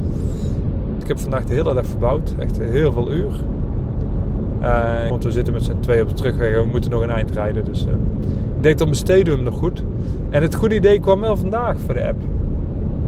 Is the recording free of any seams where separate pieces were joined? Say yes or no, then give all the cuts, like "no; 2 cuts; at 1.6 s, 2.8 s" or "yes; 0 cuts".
no; 2 cuts; at 1.0 s, 5.1 s